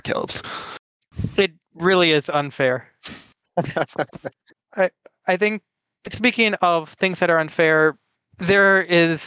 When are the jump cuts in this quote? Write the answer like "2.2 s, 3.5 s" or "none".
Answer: none